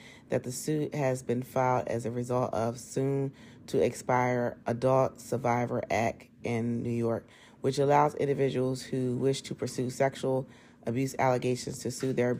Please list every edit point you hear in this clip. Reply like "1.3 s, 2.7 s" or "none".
4.6 s